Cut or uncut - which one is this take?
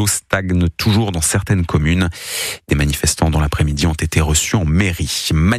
uncut